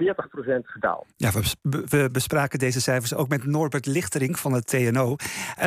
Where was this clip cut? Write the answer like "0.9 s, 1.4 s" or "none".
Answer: none